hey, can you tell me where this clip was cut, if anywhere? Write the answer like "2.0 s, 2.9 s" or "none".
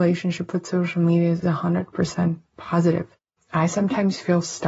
1.4 s